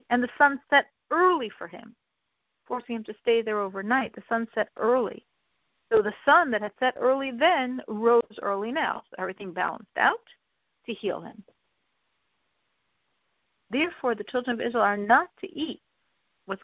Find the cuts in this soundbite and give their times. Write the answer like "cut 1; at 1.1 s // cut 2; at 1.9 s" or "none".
none